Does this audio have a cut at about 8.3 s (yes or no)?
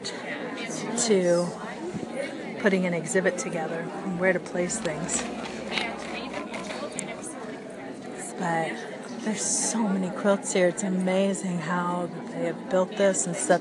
yes